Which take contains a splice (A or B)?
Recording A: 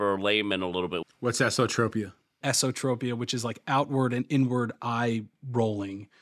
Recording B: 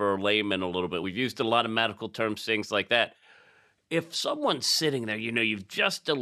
A